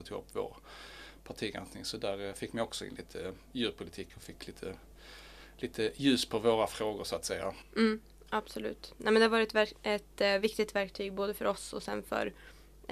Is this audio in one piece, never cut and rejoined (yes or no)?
yes